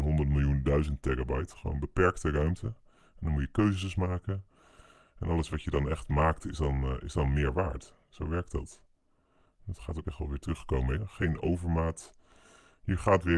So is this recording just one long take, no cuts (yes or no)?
no